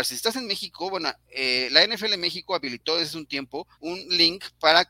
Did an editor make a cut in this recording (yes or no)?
yes